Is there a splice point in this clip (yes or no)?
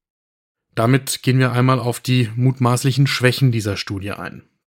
no